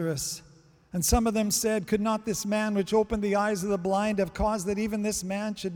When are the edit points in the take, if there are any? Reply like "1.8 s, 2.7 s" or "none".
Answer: none